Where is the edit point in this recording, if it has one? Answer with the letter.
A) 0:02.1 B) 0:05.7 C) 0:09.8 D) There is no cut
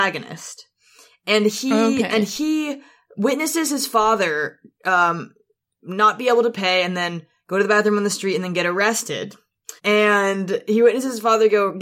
C